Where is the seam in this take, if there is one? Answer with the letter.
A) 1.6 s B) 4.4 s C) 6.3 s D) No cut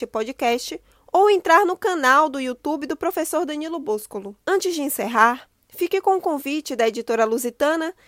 B